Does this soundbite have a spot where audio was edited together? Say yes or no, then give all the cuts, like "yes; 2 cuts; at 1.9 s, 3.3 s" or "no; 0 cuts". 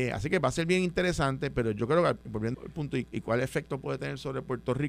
yes; 1 cut; at 2.5 s